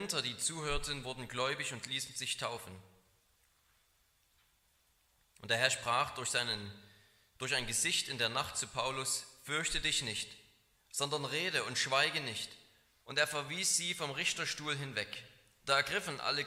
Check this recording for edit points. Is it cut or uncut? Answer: cut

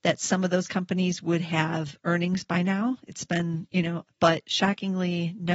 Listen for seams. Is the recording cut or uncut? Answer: cut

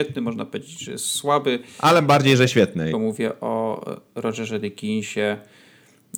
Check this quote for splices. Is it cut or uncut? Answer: cut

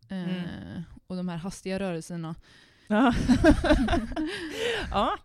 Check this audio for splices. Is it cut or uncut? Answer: cut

